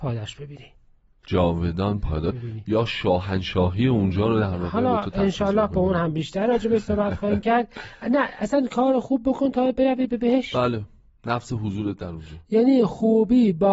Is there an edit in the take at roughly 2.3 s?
yes; 1 cut; at 2.3 s

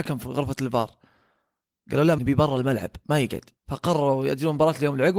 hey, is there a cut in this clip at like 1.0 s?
no; 2 cuts; at 2.2 s, 3.6 s

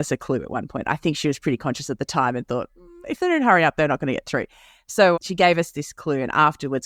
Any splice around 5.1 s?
yes; 1 cut; at 5.1 s

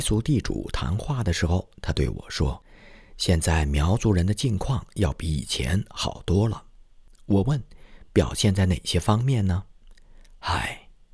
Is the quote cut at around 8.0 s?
no; 0 cuts

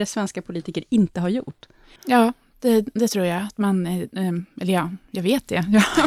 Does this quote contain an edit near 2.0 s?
yes; 1 cut; at 2.0 s

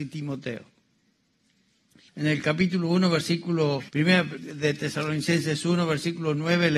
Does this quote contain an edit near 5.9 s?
no; 2 cuts; at 2.1 s, 3.9 s

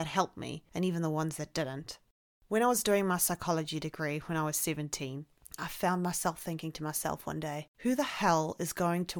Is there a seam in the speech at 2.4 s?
no; 2 cuts; at 5.6 s, 7.7 s

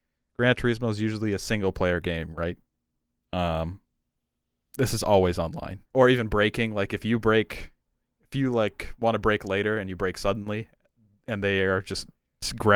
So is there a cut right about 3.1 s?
no; 1 cut; at 5.9 s

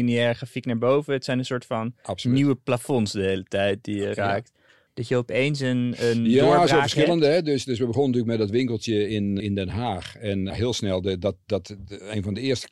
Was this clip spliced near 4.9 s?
yes; 3 cuts; at 4.9 s, 9.4 s, 10.5 s

